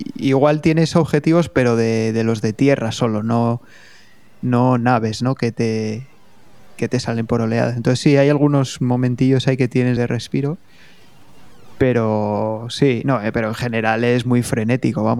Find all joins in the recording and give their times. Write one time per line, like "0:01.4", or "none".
0:10.0